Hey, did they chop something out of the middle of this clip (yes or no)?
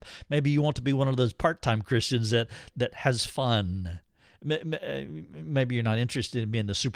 yes